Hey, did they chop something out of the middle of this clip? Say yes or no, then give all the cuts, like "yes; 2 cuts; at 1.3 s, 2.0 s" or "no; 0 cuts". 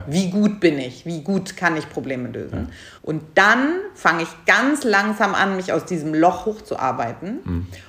yes; 1 cut; at 3.0 s